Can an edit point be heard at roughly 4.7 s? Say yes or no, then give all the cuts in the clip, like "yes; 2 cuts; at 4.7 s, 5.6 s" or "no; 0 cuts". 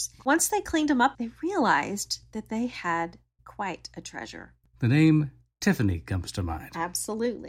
no; 0 cuts